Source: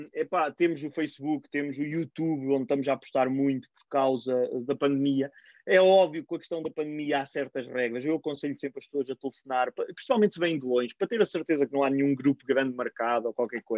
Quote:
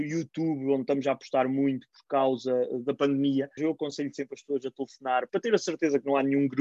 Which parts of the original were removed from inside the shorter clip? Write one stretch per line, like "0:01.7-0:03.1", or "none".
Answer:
0:05.4-0:08.0
0:09.7-0:11.0